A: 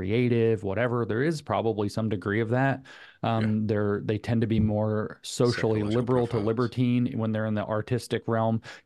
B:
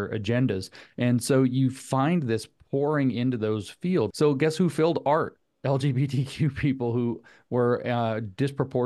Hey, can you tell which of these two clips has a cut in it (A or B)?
B